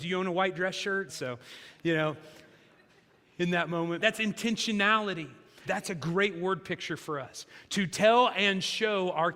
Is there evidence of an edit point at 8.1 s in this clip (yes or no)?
no